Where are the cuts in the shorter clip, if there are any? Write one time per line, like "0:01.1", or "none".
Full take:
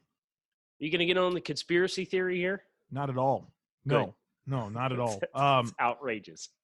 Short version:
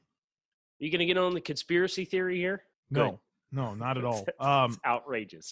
0:02.7

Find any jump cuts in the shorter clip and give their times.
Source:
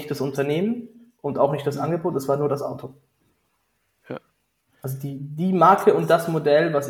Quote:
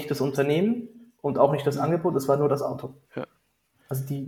0:03.0

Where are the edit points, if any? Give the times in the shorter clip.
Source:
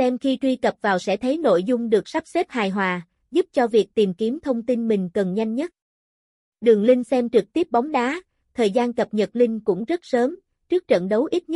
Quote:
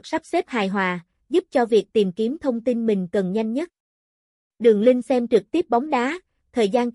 none

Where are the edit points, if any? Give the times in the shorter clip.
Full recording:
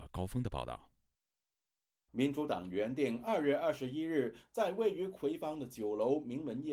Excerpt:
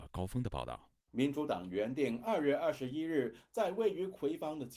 0:01.0

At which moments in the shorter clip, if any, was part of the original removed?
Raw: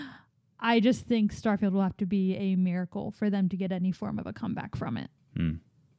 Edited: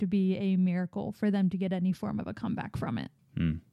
none

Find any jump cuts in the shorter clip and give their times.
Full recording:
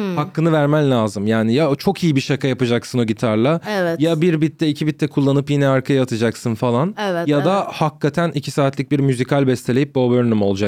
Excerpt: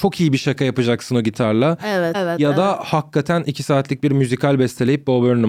0:02.1

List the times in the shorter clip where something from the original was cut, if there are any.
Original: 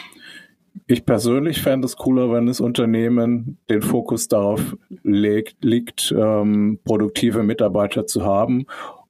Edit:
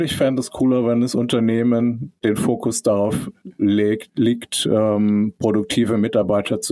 none

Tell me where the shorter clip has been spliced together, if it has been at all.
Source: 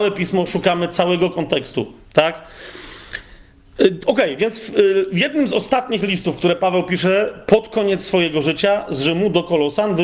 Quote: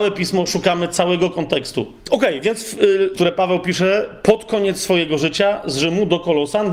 0:02.0
0:03.1

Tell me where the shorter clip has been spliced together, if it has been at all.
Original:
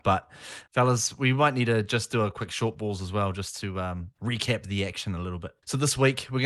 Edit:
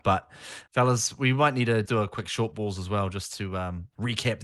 0:01.9

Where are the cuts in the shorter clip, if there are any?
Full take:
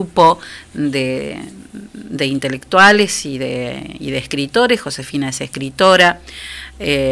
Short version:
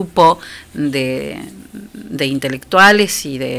none

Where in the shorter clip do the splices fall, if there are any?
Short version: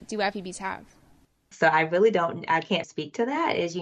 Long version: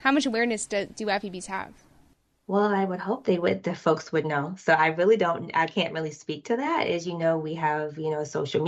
0:01.5
0:02.8

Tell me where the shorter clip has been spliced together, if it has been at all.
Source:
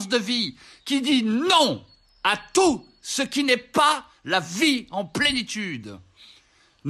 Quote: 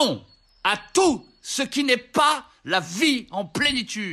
none

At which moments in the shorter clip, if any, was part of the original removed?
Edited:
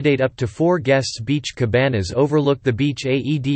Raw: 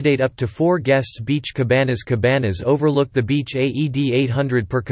0:01.5

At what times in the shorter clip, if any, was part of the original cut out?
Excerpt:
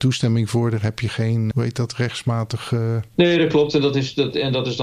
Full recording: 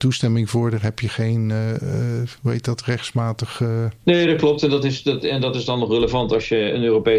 0:01.5

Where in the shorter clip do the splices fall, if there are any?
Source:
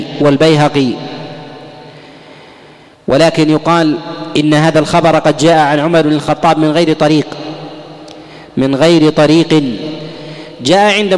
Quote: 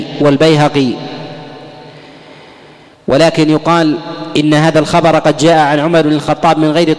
none

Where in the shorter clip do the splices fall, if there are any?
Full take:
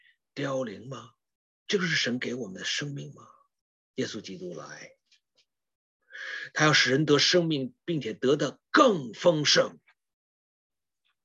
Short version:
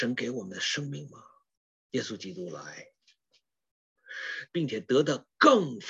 0:04.5

